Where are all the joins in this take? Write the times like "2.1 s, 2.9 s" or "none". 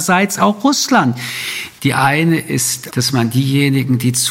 1.8 s, 2.9 s